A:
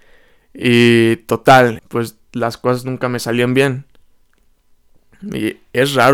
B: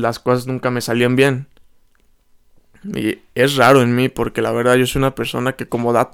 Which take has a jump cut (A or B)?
A